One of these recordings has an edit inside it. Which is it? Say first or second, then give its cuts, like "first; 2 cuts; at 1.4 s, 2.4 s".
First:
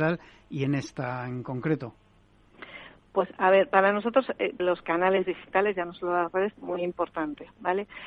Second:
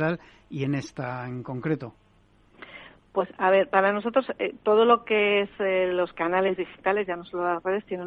first; 2 cuts; at 4.6 s, 6.5 s